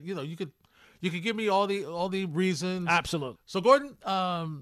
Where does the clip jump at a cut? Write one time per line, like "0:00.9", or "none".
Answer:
0:03.3